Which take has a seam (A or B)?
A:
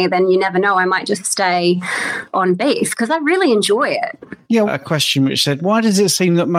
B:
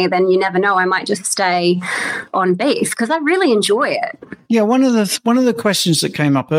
A